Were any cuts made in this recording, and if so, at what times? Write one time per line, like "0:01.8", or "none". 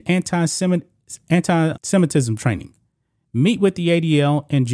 0:01.7

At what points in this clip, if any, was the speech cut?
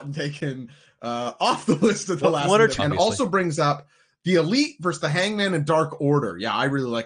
0:02.8

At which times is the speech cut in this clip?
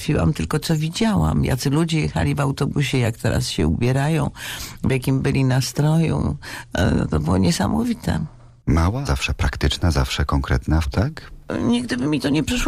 0:09.0
0:10.8

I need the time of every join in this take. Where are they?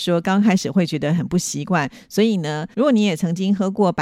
0:02.7

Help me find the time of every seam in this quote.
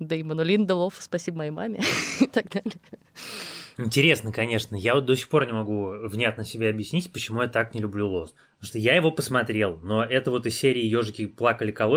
none

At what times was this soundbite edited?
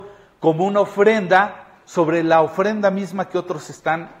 none

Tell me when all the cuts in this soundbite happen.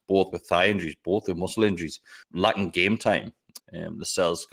0:02.2
0:03.6

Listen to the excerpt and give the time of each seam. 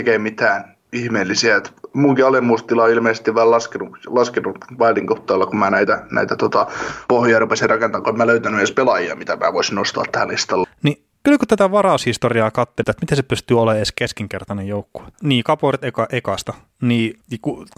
0:10.6
0:12.8
0:15.1

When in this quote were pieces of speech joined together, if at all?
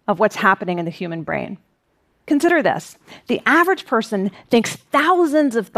0:02.1

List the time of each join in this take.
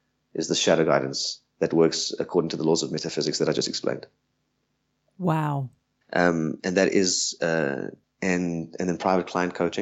0:06.0
0:08.0

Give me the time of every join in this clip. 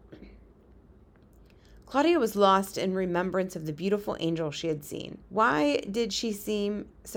0:05.2

